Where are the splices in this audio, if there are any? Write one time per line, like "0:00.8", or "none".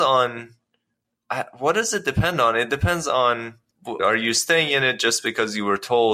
0:04.0